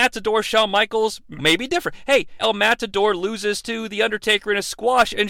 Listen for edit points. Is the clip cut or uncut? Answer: cut